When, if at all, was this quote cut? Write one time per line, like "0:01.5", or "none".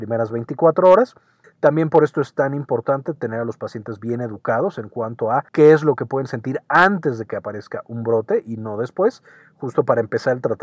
0:01.4
0:05.5